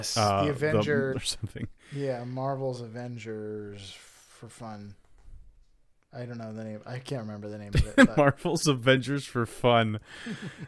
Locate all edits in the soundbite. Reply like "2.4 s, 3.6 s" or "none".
1.1 s